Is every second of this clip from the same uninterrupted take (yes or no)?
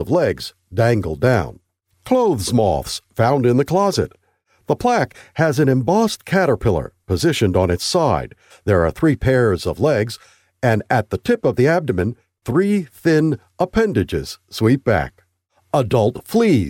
no